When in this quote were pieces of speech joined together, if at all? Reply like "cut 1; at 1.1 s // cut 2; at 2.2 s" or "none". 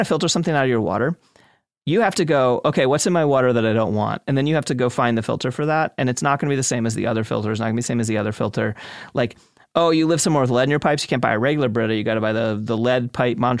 none